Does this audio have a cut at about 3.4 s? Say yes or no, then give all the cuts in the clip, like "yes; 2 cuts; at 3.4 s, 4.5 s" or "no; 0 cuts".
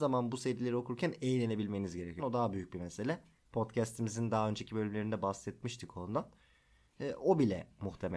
no; 1 cut; at 2.2 s